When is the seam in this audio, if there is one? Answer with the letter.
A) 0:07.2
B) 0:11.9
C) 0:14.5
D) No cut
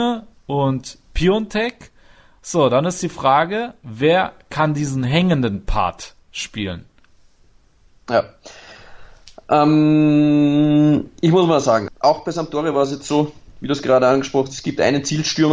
B